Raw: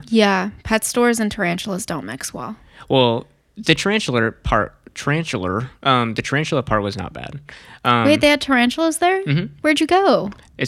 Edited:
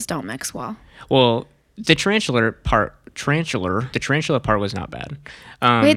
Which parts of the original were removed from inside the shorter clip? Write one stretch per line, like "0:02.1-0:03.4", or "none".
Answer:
0:05.7-0:06.2